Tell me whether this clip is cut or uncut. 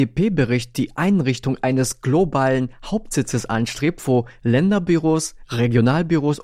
uncut